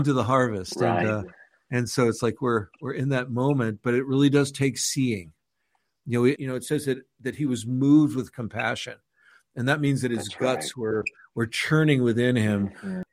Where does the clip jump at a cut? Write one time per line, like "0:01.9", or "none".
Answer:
0:06.3